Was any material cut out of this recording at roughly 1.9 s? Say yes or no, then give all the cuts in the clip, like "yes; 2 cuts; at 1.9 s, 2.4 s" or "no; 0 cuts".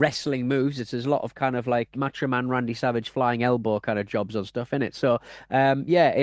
yes; 1 cut; at 1.9 s